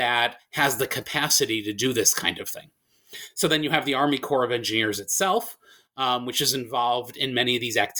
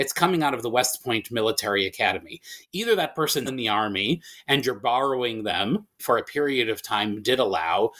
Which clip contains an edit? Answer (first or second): second